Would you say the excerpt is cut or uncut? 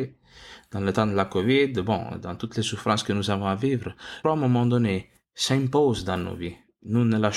cut